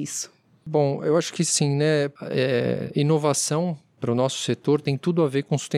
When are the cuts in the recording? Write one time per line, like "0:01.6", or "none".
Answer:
none